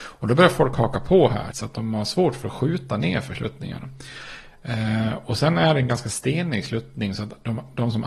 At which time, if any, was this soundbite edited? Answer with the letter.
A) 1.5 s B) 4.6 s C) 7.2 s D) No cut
A